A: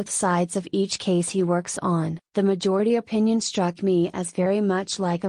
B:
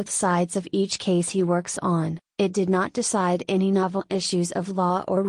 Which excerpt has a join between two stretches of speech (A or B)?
A